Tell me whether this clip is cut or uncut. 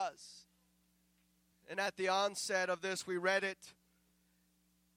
cut